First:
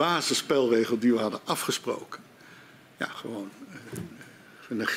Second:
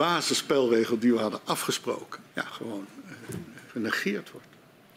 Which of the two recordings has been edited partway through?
second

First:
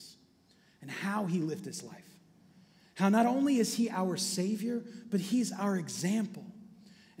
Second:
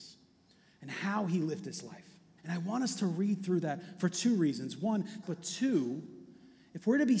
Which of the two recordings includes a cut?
second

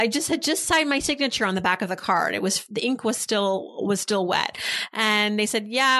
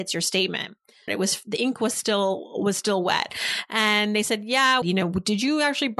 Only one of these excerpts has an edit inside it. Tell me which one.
second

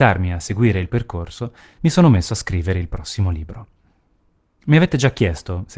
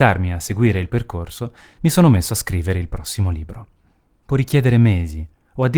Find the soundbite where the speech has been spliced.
second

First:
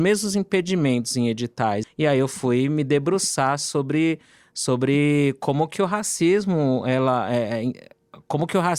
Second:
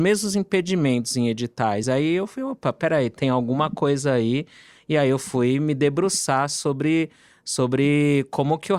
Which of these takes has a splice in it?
first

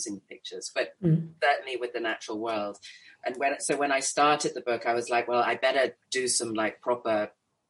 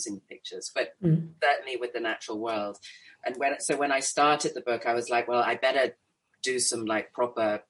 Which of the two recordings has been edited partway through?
first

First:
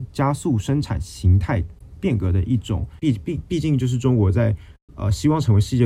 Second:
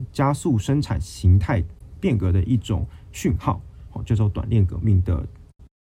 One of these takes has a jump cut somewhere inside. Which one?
first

